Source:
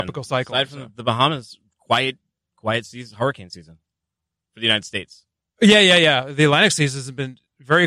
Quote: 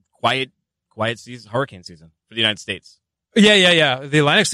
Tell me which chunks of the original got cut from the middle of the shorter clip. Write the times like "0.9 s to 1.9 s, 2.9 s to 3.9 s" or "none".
3.8 s to 4.4 s